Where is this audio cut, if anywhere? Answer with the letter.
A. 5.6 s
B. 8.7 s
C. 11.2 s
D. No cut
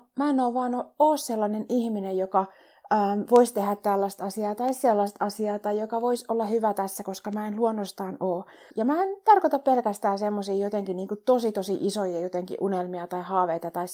B